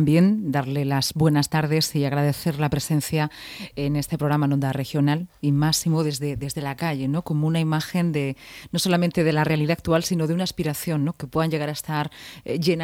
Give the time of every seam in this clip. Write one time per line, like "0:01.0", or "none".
none